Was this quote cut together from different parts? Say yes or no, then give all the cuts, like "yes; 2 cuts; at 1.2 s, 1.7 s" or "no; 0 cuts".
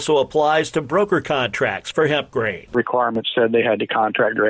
no; 0 cuts